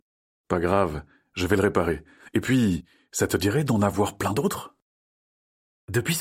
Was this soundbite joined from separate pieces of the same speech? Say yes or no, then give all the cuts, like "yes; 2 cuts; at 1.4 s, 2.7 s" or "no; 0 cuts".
no; 0 cuts